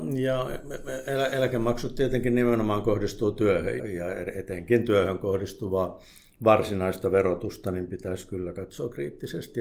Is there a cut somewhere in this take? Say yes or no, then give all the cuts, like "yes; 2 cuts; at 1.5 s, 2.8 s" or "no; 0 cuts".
yes; 1 cut; at 3.8 s